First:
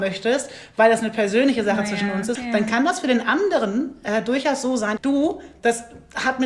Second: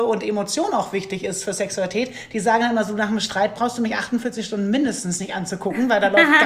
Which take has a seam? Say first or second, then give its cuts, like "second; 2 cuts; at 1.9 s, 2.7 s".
first; 2 cuts; at 2.4 s, 5.0 s